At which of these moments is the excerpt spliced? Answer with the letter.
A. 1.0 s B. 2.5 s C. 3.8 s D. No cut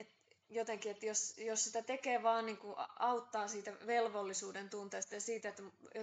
D